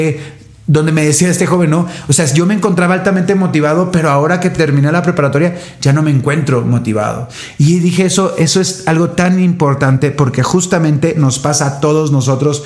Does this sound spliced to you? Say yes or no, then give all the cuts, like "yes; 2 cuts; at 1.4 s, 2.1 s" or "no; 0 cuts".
no; 0 cuts